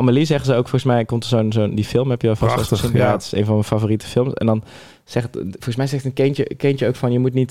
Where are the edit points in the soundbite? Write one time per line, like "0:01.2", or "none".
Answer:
none